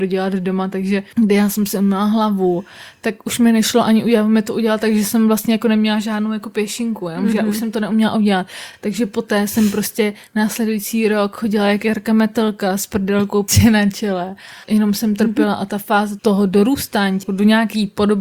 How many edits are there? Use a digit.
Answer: 0